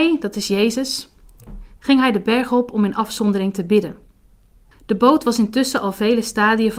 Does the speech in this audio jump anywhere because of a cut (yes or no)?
yes